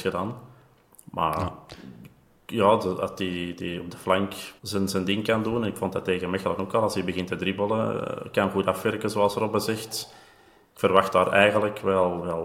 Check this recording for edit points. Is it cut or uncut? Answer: cut